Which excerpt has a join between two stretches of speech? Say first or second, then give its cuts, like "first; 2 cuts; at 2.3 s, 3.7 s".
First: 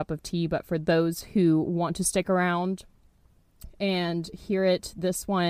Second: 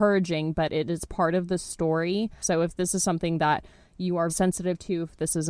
second; 2 cuts; at 2.4 s, 4.3 s